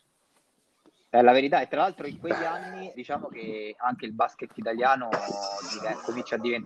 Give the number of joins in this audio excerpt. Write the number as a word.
one